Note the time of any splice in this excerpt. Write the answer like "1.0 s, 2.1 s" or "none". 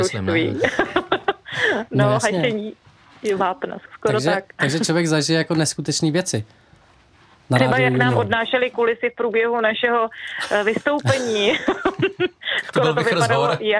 3.9 s